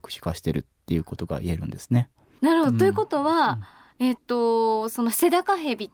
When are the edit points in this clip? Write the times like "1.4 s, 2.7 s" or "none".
none